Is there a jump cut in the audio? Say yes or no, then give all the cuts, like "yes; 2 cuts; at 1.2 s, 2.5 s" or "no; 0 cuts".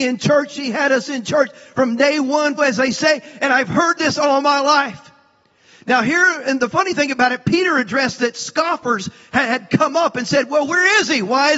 yes; 1 cut; at 2.6 s